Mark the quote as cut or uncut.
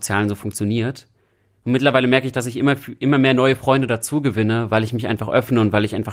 uncut